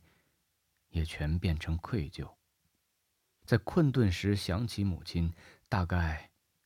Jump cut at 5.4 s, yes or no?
no